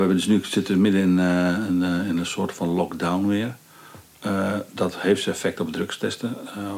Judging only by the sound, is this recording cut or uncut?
uncut